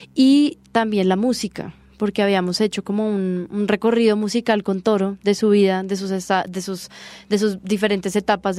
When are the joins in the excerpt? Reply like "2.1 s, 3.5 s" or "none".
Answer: none